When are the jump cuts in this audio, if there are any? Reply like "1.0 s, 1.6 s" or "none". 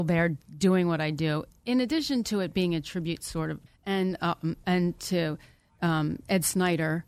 3.7 s